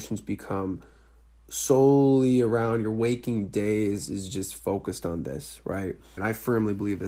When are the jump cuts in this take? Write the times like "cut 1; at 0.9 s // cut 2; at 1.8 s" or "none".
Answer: cut 1; at 6.2 s